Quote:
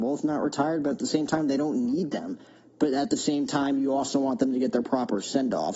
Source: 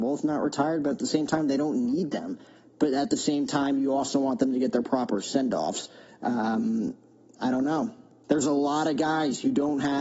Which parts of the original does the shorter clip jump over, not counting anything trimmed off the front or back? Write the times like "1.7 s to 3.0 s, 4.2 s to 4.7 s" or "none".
none